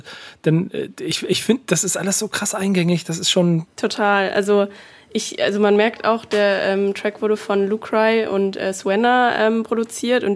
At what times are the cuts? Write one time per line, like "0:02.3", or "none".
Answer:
0:03.7